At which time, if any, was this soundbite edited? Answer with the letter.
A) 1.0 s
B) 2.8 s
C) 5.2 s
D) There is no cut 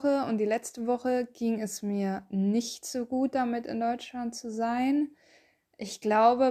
D